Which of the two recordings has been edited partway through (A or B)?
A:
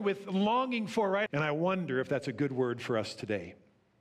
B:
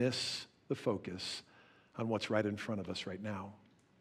A